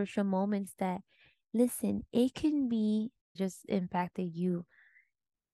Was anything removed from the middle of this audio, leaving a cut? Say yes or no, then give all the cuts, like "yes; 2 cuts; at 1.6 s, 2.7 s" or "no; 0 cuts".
no; 0 cuts